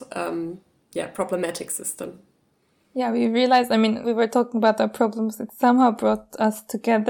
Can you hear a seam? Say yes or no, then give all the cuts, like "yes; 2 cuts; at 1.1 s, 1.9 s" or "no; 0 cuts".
yes; 1 cut; at 4.0 s